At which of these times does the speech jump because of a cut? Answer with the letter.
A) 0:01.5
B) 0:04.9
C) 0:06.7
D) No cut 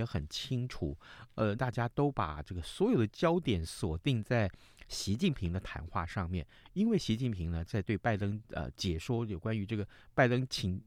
A